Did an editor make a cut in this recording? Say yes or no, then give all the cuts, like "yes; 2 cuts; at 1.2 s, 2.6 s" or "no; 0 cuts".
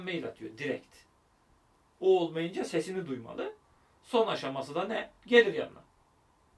no; 0 cuts